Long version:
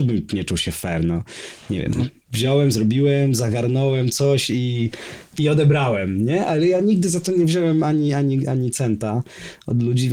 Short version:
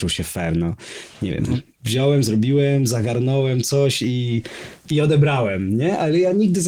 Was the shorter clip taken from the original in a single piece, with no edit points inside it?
yes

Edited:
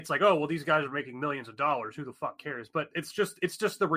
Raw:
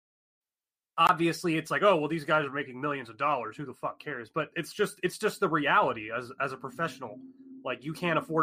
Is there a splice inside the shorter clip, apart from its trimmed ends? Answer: no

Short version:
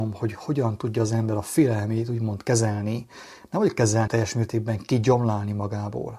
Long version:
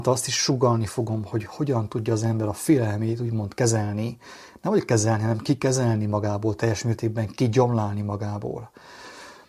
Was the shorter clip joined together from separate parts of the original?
yes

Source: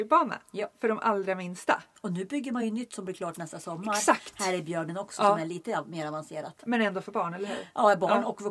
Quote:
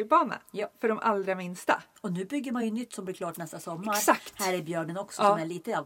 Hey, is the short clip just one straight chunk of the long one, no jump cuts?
yes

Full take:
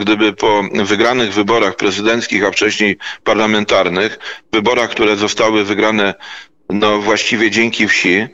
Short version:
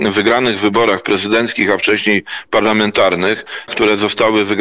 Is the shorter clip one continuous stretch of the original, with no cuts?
no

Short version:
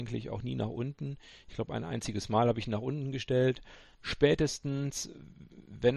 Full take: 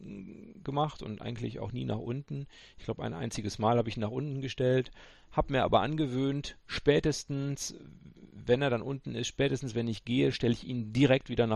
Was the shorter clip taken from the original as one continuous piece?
no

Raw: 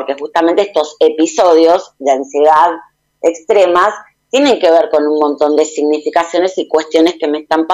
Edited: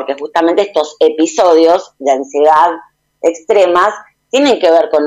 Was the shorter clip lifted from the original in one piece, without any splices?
yes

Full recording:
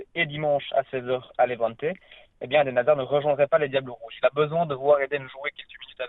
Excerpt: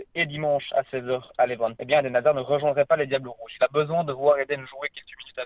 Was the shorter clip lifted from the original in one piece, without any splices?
no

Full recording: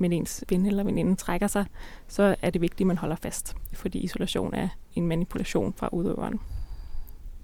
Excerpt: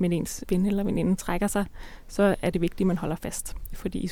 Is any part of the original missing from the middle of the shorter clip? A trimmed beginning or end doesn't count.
no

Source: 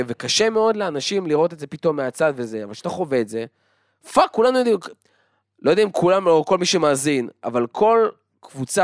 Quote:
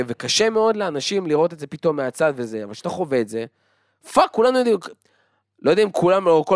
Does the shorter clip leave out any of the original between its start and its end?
no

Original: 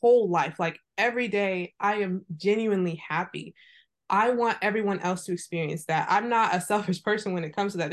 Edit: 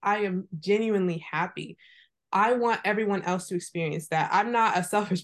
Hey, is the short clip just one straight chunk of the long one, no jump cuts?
yes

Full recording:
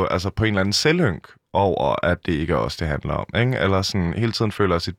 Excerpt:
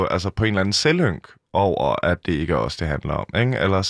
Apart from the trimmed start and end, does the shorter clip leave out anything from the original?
no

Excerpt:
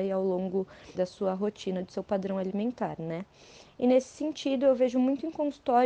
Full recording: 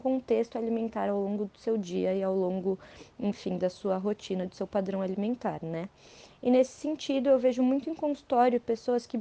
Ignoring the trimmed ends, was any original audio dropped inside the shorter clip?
yes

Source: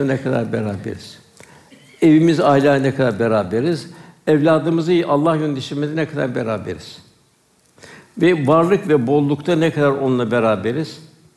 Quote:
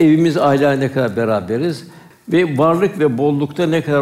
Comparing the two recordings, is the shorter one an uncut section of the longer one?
no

